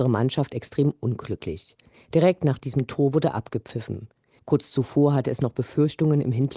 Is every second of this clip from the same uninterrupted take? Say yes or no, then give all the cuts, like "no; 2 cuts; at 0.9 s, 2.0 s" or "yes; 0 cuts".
no; 2 cuts; at 1.9 s, 4.4 s